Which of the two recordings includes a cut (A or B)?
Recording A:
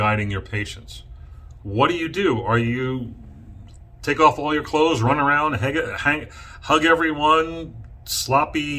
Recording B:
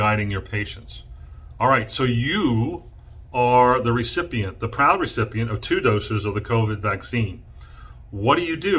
A